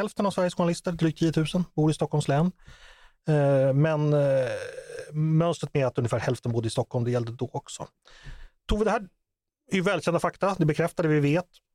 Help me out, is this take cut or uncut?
cut